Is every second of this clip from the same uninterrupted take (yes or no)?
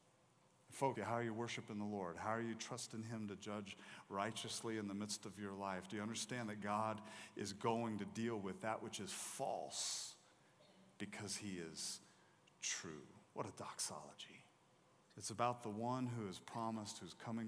no